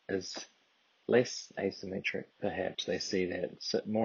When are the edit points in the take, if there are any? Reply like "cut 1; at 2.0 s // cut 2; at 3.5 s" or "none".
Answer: cut 1; at 2.3 s